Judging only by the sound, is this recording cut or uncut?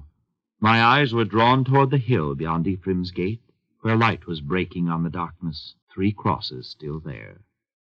cut